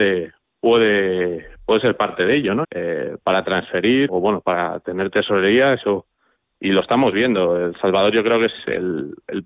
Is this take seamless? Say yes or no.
no